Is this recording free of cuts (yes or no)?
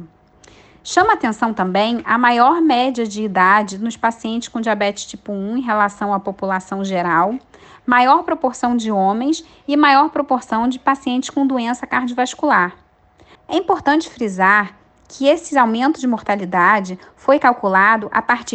no